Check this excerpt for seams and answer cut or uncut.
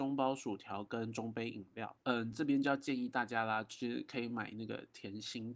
uncut